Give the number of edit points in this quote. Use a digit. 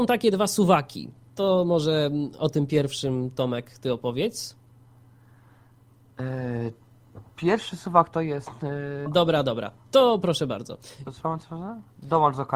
2